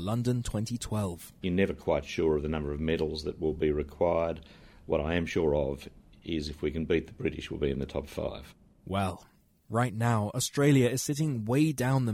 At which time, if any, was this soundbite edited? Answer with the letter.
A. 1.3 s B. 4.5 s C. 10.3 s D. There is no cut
D